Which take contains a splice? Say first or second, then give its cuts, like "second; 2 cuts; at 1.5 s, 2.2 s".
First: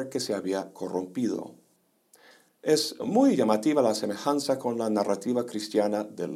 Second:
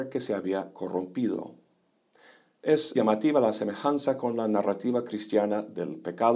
second; 1 cut; at 2.9 s